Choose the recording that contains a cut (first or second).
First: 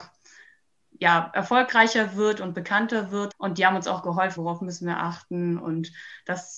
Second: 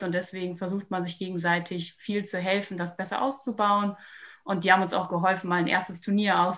first